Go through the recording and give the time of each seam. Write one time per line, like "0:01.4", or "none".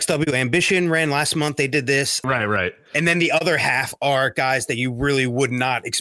0:02.2

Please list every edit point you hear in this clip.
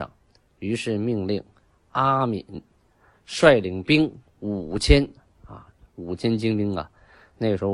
none

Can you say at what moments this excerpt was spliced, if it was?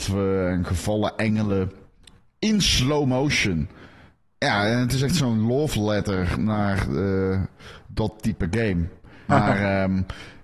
0:09.3

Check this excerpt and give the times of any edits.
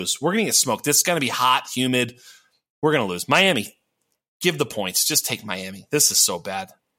none

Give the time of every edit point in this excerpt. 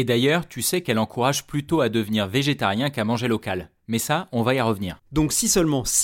0:05.0

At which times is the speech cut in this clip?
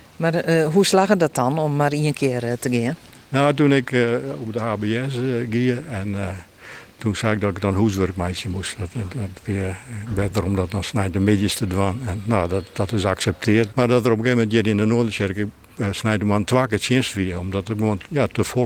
0:09.1
0:13.7

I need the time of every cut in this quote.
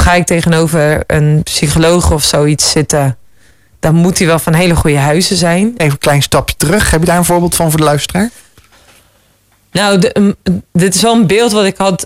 0:05.8

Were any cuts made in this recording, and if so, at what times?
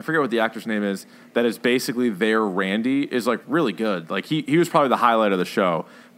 none

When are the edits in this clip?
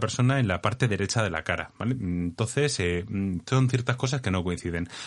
none

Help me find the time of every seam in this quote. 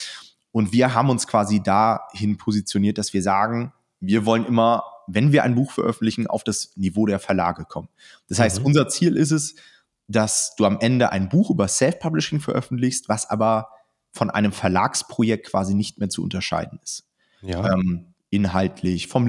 0:18.2

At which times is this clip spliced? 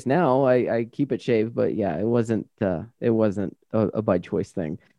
none

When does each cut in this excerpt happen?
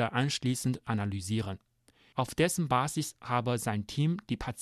0:02.1

